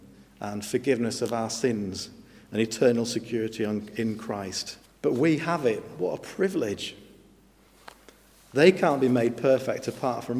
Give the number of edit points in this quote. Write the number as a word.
one